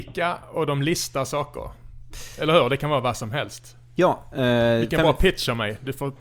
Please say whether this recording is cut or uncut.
uncut